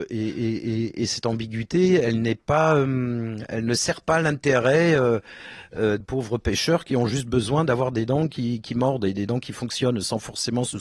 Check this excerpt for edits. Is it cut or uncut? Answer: cut